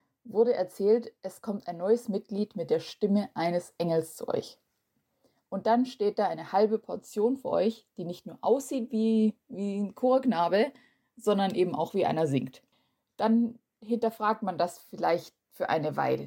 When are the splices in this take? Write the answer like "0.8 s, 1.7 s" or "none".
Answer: none